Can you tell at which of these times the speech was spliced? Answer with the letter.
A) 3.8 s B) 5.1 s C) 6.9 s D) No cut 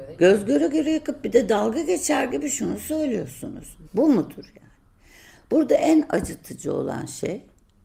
A